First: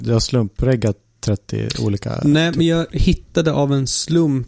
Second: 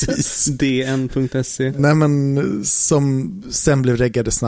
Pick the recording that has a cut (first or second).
first